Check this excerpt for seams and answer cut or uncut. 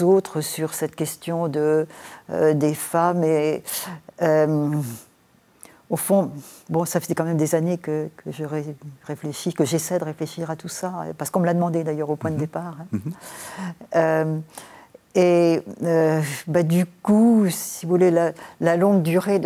uncut